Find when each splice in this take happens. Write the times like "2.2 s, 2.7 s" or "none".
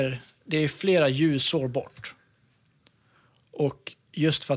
3.4 s